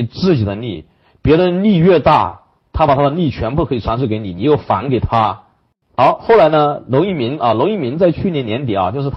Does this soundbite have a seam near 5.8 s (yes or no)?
yes